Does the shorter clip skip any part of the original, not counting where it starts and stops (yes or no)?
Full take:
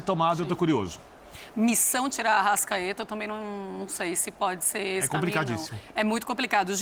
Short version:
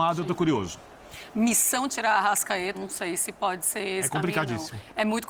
yes